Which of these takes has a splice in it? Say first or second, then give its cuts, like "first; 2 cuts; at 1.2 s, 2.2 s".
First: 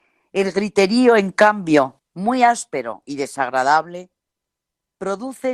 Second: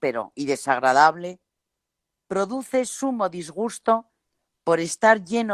first; 1 cut; at 2.0 s